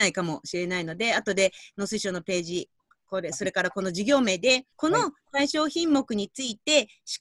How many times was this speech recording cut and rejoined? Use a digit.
1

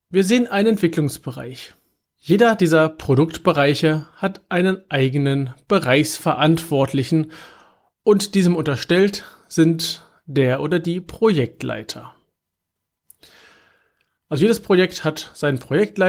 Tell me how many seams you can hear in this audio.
2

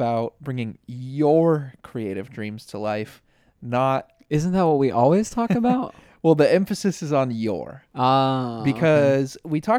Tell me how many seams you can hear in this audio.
0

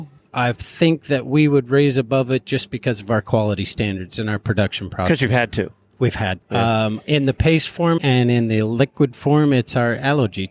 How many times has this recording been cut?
2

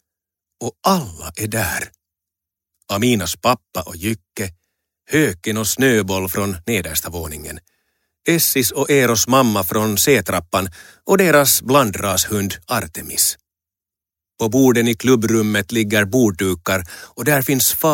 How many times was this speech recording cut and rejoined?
0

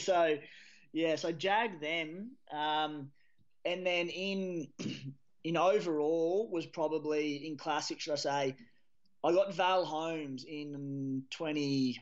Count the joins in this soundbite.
0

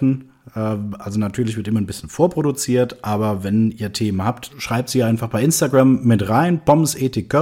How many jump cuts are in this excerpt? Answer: 1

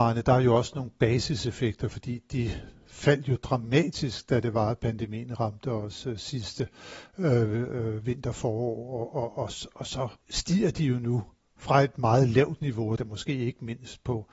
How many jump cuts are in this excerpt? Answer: 2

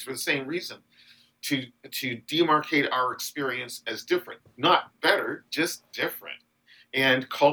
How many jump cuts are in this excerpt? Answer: 1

